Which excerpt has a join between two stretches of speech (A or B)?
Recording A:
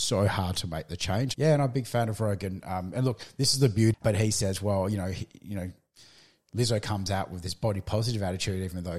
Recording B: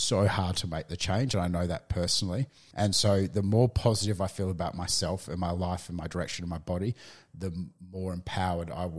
A